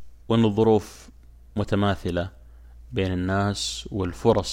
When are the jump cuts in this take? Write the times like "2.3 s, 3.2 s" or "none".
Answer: none

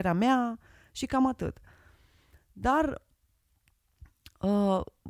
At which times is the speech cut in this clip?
none

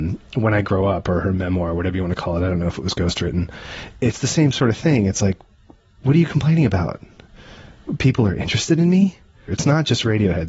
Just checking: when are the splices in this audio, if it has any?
9.5 s

